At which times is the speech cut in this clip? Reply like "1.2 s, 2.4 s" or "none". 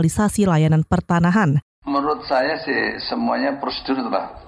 1.6 s